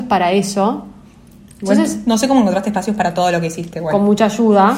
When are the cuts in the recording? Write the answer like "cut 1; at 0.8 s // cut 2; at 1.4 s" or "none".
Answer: none